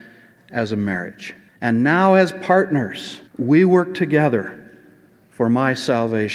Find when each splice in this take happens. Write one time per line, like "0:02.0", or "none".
0:01.5
0:03.3